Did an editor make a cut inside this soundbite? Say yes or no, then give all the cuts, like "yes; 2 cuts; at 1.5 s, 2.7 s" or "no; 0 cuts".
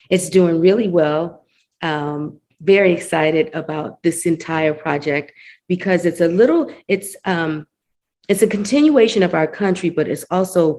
no; 0 cuts